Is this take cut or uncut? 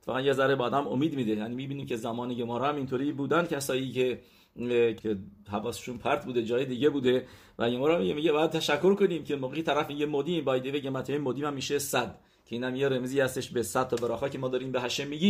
cut